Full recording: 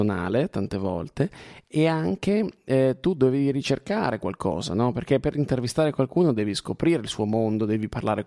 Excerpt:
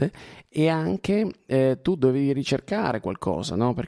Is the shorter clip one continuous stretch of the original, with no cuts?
yes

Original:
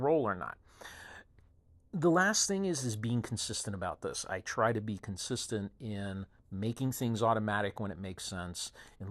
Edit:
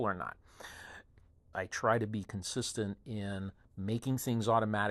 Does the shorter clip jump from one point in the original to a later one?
yes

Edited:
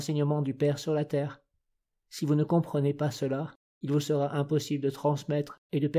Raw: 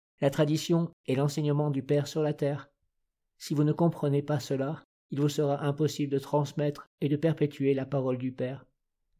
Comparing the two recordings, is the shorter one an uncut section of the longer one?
yes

